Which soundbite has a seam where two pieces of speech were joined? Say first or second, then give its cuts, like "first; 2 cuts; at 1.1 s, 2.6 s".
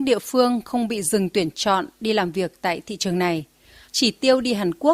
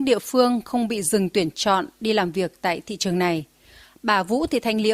first; 1 cut; at 3.8 s